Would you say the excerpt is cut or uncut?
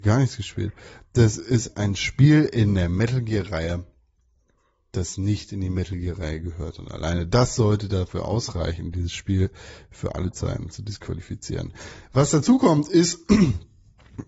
uncut